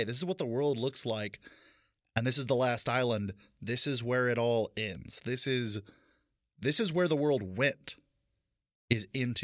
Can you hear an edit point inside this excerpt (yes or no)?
no